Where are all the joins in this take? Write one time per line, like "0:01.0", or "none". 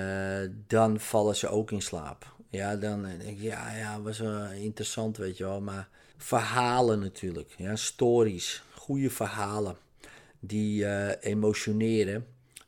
0:06.1

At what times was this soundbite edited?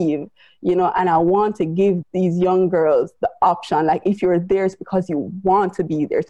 none

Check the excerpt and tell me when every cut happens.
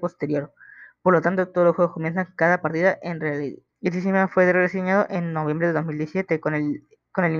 0:03.7

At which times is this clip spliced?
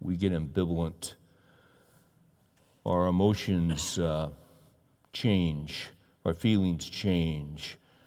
none

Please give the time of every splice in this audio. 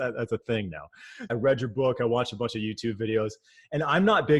0:01.3

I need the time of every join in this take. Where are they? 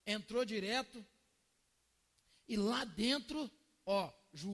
none

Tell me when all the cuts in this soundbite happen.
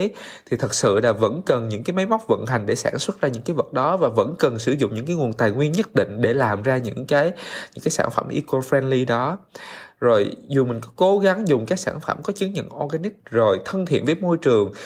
0:13.2

